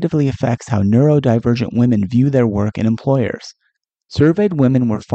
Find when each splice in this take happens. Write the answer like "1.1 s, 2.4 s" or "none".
none